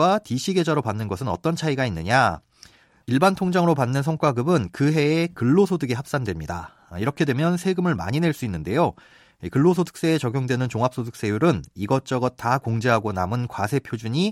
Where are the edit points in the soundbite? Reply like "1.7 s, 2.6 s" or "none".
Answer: none